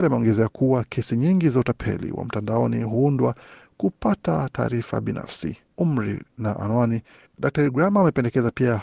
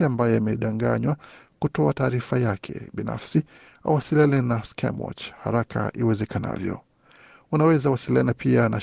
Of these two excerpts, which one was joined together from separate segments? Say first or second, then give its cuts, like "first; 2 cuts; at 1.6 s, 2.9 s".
first; 2 cuts; at 5.7 s, 7.3 s